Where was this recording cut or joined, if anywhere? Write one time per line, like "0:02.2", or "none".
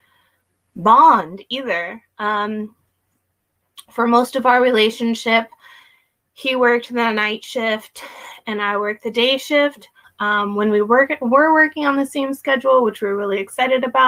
0:10.0